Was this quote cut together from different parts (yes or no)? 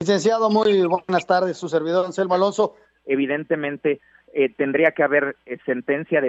yes